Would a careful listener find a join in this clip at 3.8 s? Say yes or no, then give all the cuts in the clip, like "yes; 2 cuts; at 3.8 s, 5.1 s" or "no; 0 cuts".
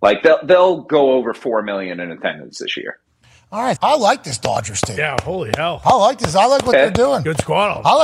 yes; 1 cut; at 3.8 s